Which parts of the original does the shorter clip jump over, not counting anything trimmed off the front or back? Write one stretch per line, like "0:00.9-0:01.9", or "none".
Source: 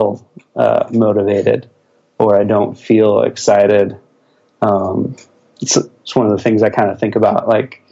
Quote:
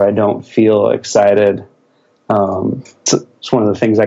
0:05.4-0:05.7